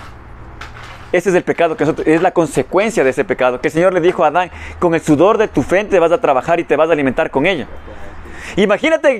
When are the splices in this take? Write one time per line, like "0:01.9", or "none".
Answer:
none